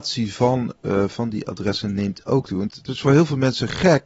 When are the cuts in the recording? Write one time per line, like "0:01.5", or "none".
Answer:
0:02.7